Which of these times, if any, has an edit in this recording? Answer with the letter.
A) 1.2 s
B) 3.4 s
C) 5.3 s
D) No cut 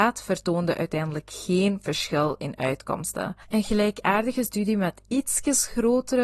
B